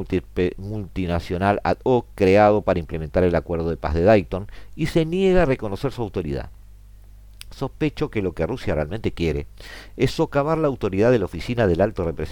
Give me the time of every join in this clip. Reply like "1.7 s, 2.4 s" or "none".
none